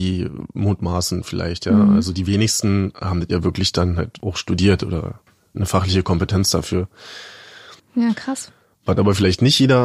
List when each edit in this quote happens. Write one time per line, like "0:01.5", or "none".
0:07.8